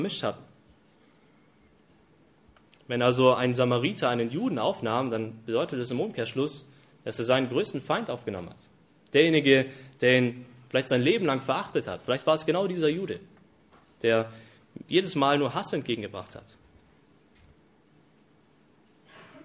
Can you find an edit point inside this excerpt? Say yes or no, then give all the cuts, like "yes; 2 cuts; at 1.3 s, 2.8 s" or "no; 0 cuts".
no; 0 cuts